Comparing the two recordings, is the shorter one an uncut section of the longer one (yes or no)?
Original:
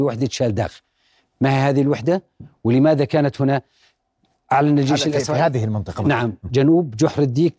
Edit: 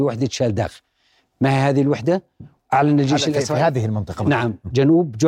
no